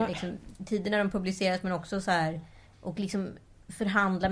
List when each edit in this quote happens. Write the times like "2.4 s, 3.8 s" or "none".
2.7 s